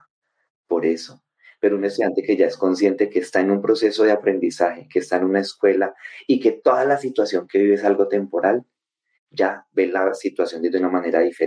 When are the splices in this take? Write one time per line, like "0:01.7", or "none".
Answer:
none